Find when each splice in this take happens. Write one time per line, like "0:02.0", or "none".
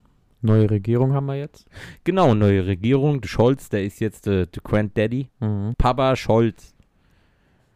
0:05.7